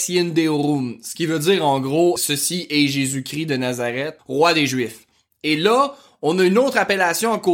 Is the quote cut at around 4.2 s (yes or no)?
yes